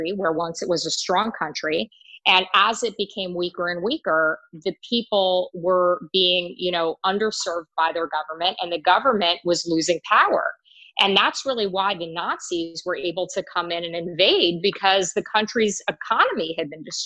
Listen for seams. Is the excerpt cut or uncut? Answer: uncut